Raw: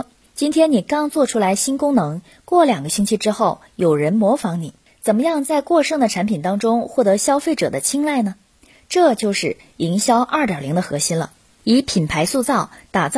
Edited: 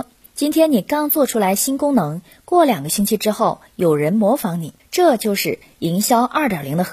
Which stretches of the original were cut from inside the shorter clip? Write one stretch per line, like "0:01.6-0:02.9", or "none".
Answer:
0:04.8-0:08.8